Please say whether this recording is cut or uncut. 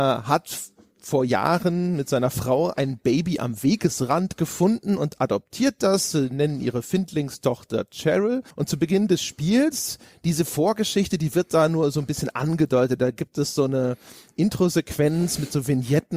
cut